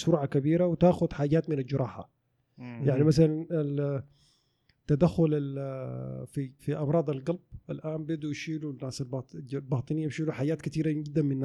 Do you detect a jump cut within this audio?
yes; 1 cut; at 6.6 s

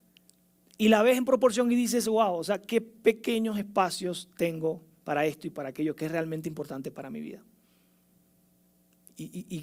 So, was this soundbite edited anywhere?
no; 0 cuts

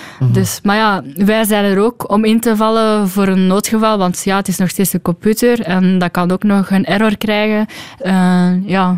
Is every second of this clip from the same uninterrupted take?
no; 2 cuts; at 2.1 s, 8.0 s

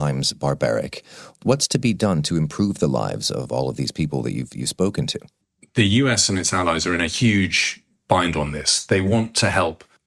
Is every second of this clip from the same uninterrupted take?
yes; 0 cuts

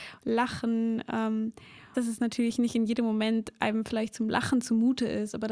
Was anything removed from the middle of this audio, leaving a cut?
yes; 1 cut; at 1.9 s

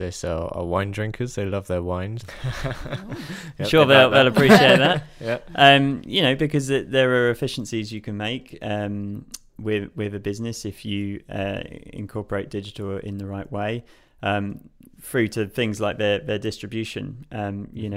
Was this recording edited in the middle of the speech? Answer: yes; 1 cut; at 2.2 s

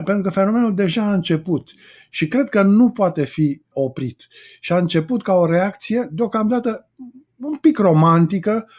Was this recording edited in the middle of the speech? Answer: yes; 1 cut; at 3.7 s

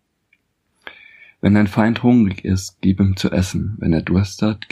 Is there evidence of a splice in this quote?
no; 0 cuts

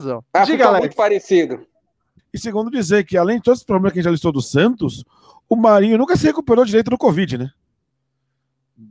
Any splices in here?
yes; 1 cut; at 2.2 s

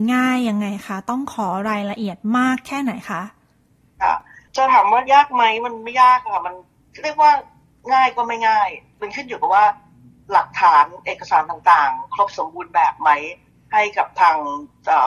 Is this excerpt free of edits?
yes; 0 cuts

